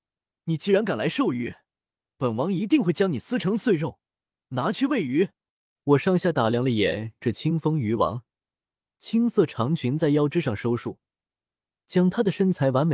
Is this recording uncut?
no; 1 cut; at 5.8 s

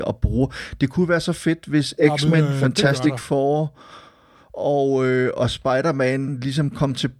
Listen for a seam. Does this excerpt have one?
no; 0 cuts

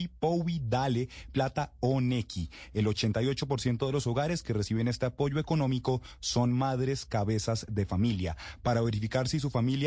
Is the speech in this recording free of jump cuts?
no; 1 cut; at 1.3 s

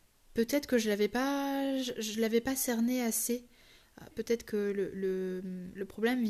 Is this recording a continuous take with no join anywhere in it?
no; 1 cut; at 4.1 s

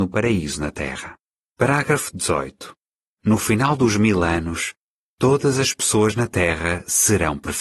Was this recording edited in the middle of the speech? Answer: yes; 2 cuts; at 1.4 s, 3.1 s

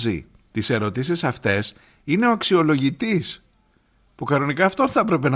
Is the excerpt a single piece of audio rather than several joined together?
yes; 0 cuts

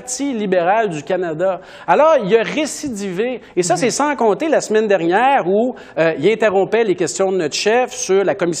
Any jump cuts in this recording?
no; 0 cuts

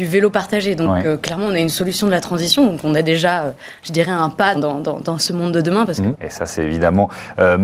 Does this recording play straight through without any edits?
no; 2 cuts; at 4.5 s, 6.1 s

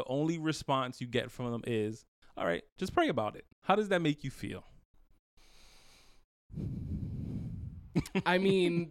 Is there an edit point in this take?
yes; 1 cut; at 3.5 s

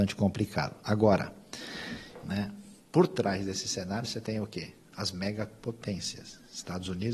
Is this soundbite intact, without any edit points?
no; 1 cut; at 2.2 s

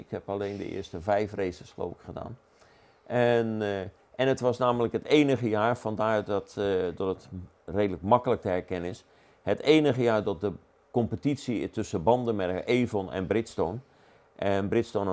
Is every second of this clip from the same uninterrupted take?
yes; 0 cuts

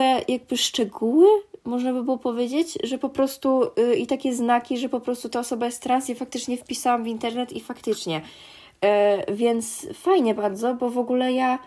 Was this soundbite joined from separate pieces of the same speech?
no; 0 cuts

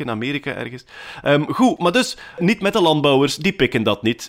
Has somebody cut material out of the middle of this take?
no; 0 cuts

